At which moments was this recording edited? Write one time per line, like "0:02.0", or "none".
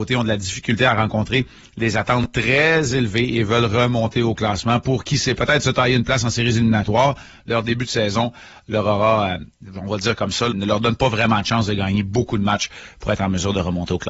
0:10.5